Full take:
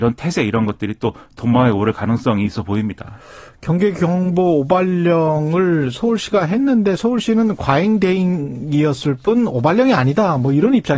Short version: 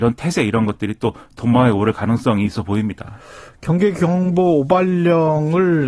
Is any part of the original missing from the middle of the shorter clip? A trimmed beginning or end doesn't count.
no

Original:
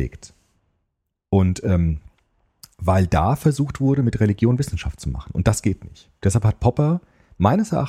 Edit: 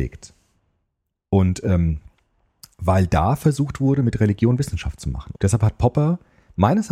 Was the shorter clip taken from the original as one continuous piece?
no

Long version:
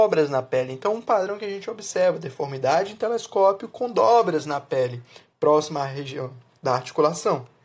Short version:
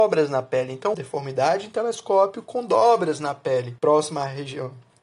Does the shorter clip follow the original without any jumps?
no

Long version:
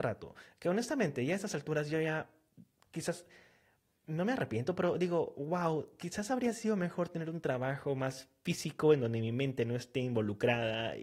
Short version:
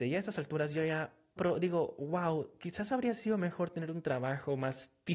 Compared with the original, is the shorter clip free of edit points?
no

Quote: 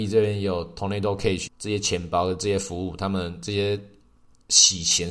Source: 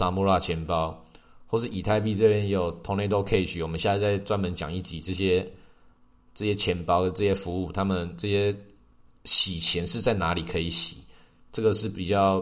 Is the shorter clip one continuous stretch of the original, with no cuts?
no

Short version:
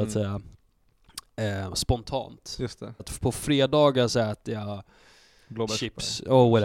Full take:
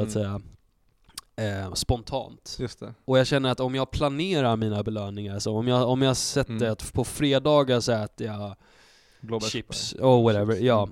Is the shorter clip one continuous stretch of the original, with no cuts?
no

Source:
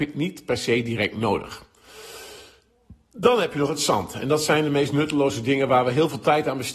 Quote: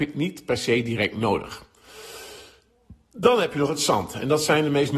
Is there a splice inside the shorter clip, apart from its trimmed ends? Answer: no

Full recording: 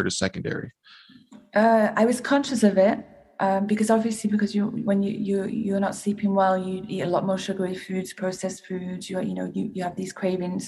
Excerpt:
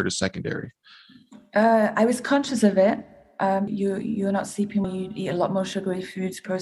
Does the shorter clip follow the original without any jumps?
no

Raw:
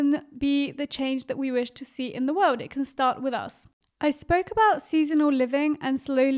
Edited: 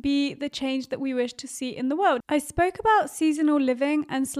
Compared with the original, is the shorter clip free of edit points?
no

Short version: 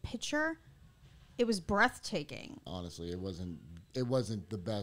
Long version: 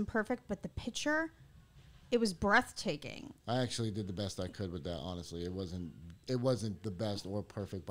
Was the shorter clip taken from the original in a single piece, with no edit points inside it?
no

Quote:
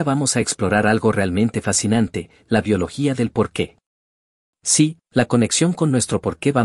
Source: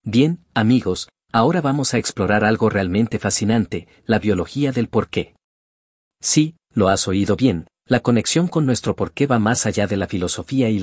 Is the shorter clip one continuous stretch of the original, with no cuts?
no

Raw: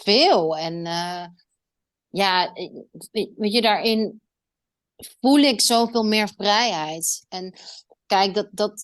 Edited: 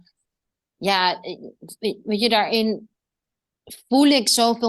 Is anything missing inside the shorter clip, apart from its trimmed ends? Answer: no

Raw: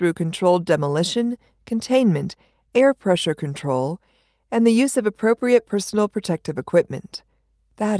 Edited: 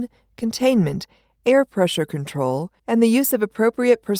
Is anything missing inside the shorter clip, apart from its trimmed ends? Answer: yes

